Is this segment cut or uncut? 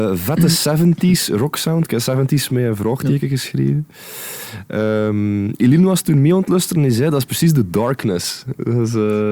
uncut